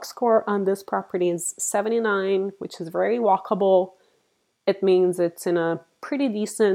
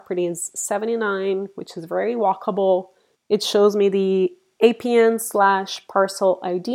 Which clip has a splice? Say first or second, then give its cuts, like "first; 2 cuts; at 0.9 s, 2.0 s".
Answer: second; 1 cut; at 3.1 s